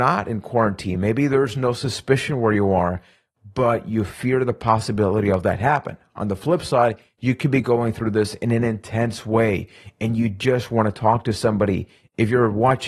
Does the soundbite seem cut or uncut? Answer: uncut